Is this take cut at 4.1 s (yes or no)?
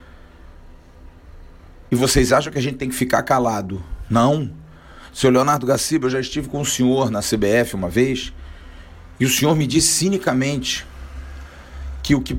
no